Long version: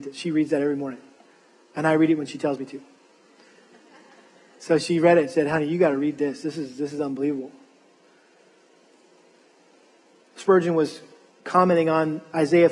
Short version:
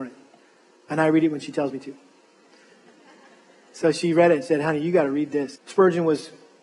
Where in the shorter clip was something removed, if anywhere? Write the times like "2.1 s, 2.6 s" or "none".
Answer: 5.6 s

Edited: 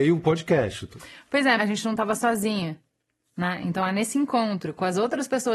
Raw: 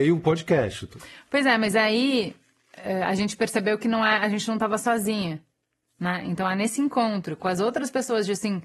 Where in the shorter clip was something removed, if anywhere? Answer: 1.6 s

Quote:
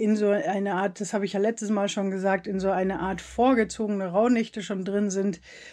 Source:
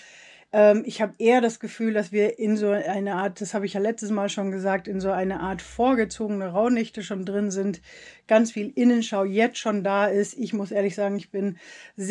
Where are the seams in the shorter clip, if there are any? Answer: none

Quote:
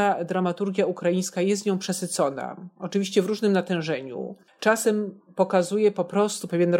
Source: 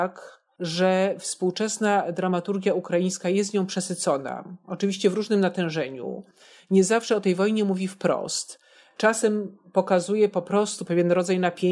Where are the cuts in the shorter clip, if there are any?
4.5 s

